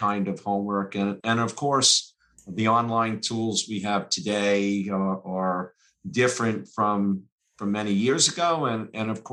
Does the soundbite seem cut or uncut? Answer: cut